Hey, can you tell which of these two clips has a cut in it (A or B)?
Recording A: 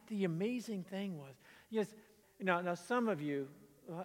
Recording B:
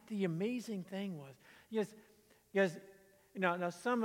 A